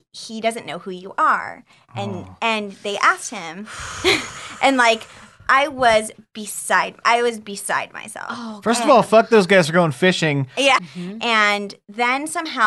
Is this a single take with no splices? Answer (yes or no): no